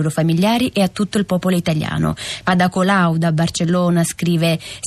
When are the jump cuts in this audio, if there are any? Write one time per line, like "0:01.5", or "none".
0:02.4